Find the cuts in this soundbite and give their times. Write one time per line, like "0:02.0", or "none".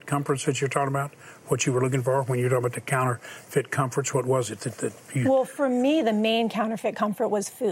none